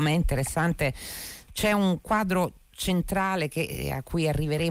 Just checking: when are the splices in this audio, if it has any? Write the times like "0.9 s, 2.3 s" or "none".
1.5 s